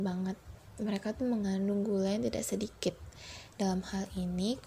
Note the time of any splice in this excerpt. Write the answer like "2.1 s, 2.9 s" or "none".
3.5 s